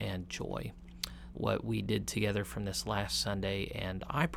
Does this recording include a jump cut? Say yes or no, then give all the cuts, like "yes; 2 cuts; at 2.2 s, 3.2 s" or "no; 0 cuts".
yes; 1 cut; at 1.3 s